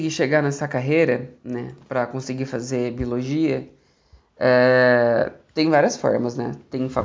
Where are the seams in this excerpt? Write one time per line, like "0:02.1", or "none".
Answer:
none